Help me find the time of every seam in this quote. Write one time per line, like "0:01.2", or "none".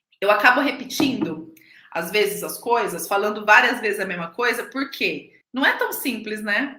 0:05.4